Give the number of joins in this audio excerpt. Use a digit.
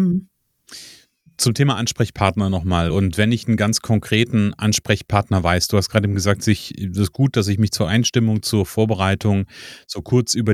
0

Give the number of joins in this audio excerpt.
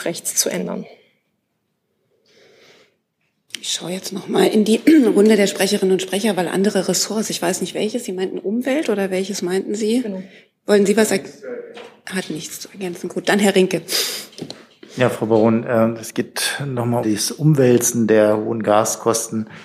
1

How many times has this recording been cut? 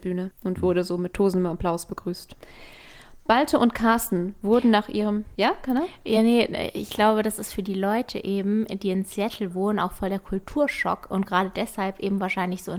0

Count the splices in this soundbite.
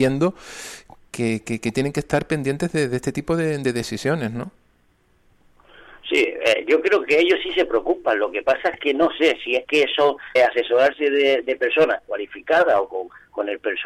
1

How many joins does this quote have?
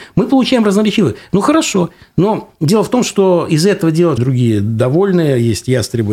2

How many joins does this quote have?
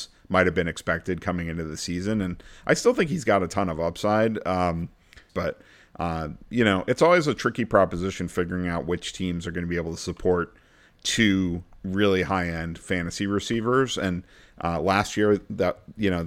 1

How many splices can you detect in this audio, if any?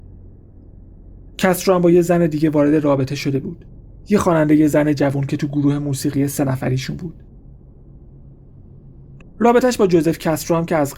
1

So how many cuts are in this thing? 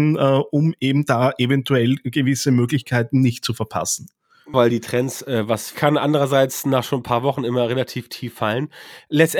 2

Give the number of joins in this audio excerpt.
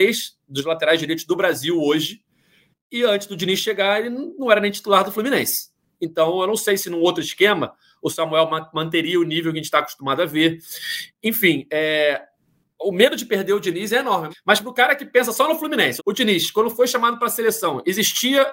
3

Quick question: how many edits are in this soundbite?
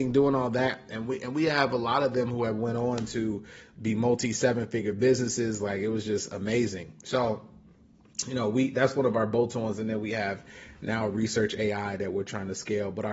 0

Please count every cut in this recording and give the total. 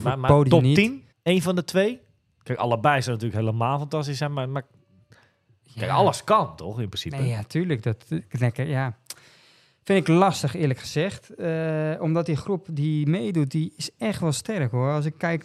1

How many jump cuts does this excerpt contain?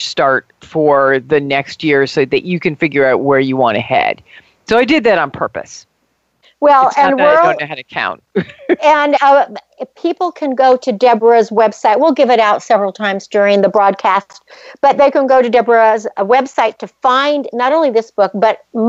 0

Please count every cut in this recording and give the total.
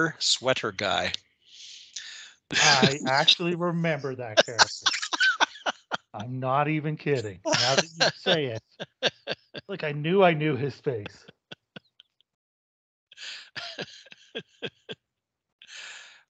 0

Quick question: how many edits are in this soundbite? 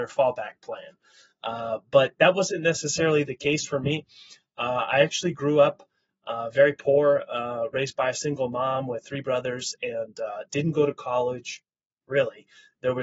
1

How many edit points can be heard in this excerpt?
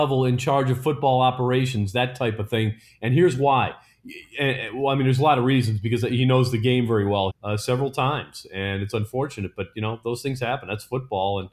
1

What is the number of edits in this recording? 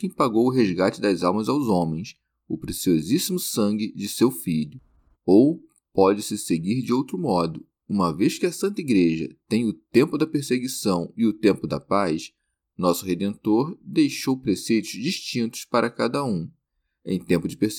1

